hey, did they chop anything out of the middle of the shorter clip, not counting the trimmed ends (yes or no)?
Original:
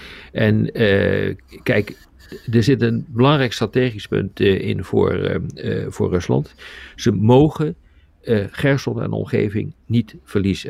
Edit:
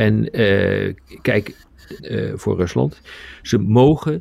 yes